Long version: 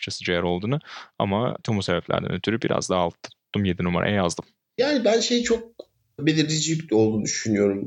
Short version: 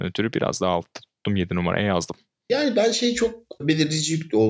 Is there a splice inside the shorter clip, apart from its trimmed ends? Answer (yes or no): yes